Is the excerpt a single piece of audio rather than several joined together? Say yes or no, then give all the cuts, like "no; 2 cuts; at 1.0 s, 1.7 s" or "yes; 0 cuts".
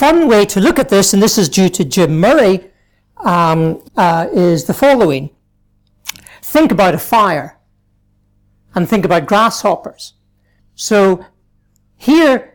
no; 2 cuts; at 3.9 s, 10.6 s